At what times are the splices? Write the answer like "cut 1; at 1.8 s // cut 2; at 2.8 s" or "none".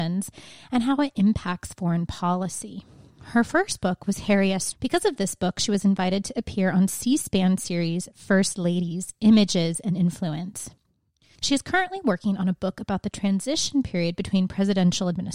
cut 1; at 4.7 s // cut 2; at 11.4 s